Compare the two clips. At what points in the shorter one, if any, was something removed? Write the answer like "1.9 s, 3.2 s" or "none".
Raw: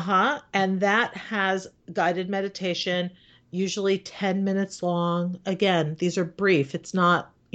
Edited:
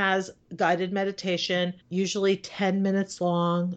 1.8 s